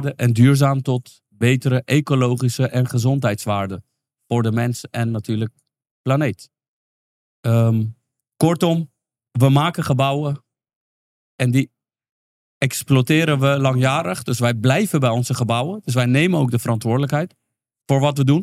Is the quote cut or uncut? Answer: uncut